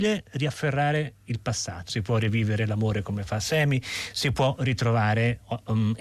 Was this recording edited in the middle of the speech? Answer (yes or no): yes